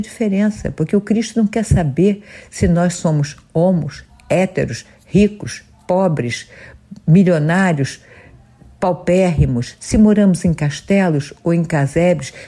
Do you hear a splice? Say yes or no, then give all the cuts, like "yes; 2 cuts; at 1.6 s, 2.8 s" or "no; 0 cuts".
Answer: no; 0 cuts